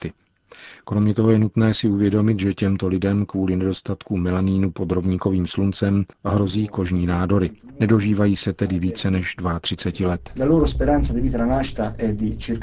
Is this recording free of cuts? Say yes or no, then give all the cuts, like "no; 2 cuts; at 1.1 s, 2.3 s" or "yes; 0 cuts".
yes; 0 cuts